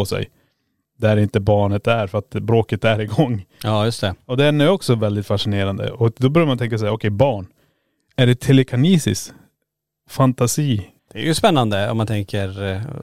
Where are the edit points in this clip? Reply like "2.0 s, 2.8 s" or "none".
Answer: 11.0 s